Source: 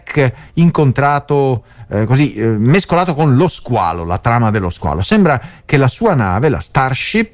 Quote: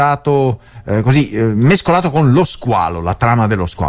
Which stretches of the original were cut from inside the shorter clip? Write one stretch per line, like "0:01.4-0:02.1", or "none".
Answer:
none

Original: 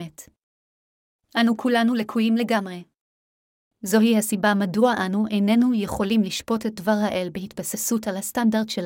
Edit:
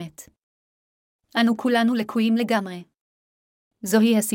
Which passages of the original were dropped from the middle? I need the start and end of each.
none

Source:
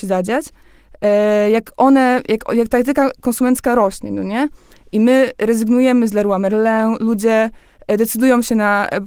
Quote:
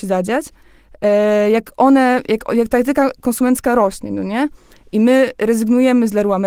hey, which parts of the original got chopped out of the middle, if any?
none

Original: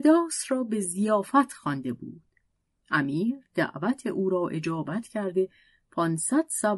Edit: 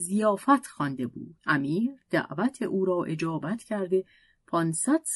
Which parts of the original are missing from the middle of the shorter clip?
0:02.2-0:02.8

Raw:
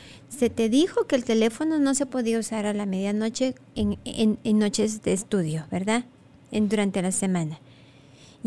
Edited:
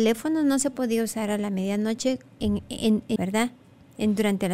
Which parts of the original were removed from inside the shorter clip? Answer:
0:04.5-0:05.7

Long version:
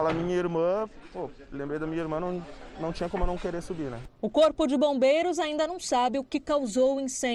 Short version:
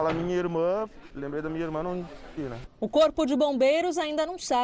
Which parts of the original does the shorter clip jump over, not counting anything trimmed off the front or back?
0:01.1-0:01.5
0:02.7-0:03.8

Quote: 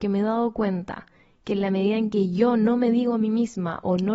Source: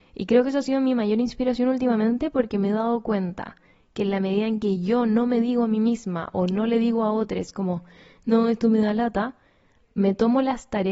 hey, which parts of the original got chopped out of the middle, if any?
none

